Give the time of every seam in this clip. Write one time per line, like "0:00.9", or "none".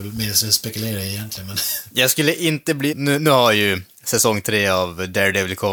0:02.9